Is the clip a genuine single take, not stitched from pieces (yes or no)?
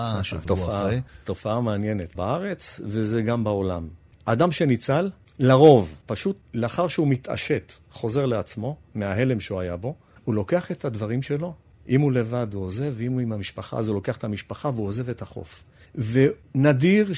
yes